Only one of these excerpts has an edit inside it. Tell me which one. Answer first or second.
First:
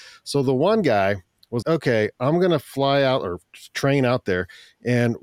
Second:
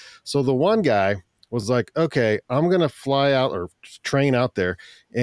first